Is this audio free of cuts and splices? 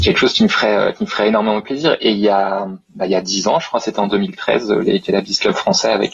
yes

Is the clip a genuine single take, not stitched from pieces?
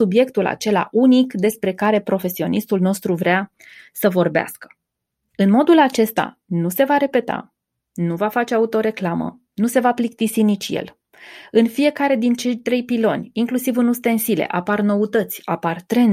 yes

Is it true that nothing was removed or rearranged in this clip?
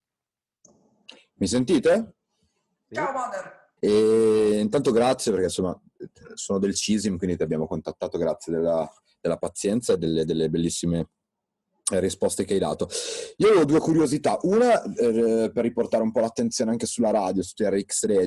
no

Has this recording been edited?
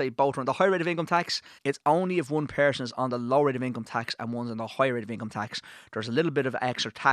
yes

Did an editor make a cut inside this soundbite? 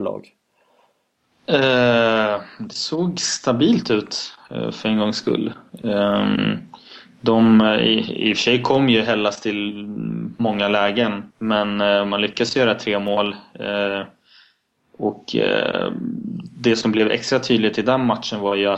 yes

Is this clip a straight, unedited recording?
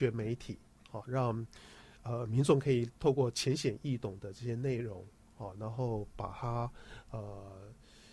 yes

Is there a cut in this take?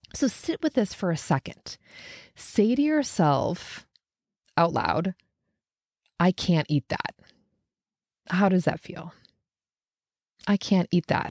no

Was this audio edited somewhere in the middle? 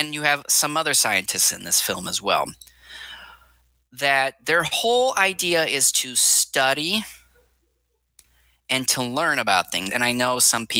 yes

